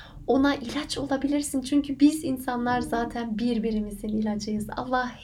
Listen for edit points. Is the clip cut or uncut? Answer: uncut